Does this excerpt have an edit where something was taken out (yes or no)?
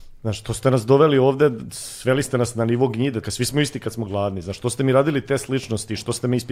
yes